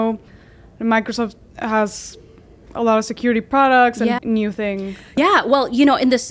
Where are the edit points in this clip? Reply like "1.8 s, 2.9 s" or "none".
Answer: 4.2 s

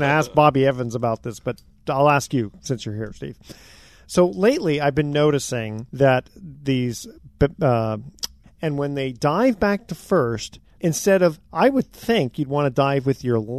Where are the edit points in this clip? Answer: 5.9 s, 8.4 s, 10.8 s

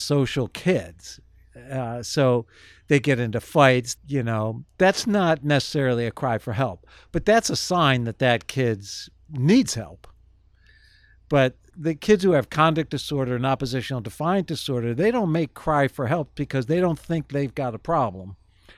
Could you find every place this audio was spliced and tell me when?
4.0 s, 11.7 s

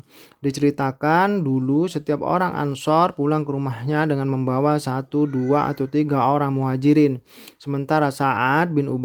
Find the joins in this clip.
none

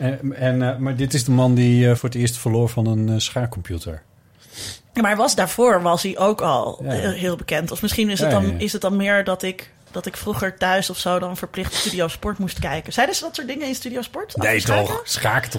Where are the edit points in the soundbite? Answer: 2.0 s

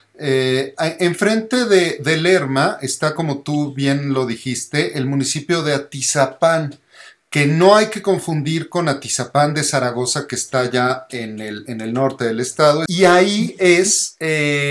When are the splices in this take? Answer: 12.9 s

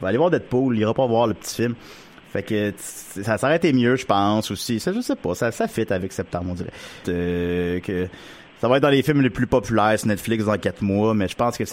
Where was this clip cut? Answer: 7.0 s

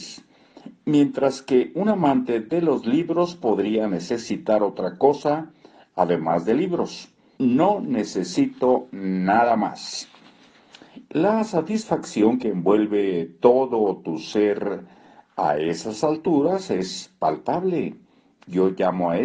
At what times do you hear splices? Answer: 7.4 s

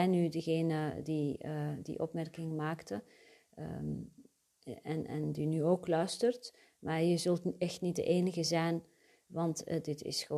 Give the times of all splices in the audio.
none

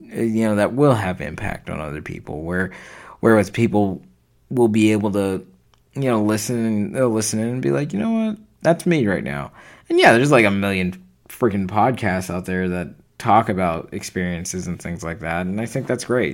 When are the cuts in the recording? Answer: none

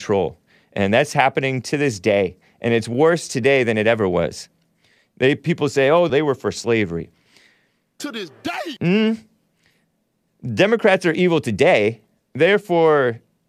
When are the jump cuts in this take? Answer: 6.1 s

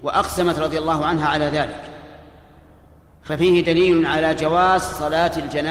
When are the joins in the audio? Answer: none

